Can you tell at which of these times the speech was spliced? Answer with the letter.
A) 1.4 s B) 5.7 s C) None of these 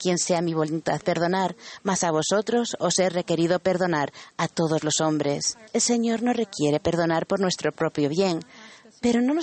B